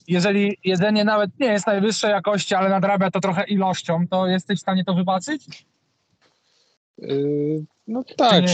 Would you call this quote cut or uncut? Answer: uncut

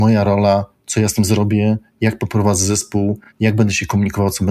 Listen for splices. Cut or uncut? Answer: uncut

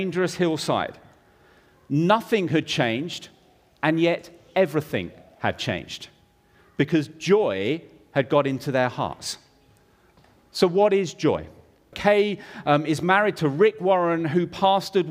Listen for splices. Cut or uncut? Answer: cut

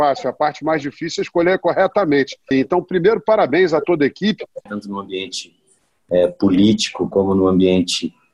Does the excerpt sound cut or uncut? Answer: cut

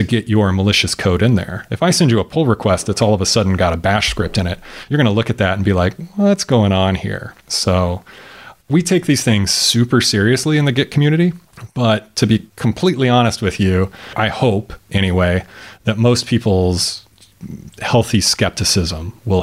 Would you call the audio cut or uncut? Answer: uncut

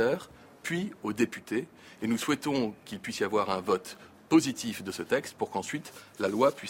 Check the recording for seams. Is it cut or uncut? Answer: uncut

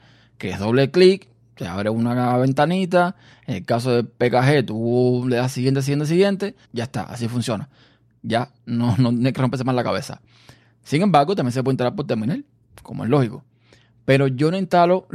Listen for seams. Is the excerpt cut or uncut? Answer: cut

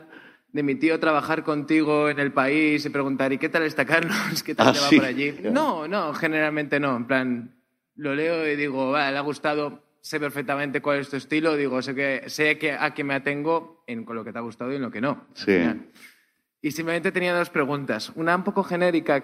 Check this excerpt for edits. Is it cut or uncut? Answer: cut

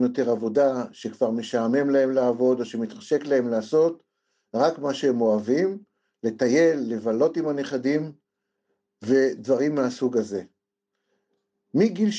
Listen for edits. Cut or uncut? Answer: uncut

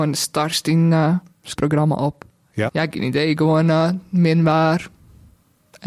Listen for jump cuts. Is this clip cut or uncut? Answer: cut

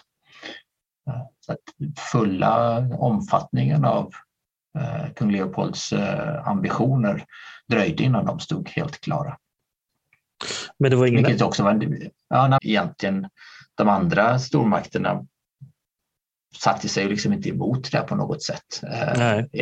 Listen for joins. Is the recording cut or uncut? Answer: cut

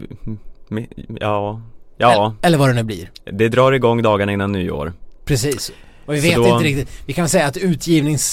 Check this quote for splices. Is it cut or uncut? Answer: uncut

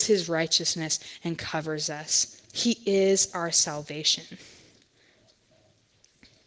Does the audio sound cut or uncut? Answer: uncut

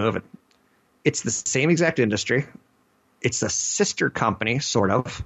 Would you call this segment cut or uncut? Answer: uncut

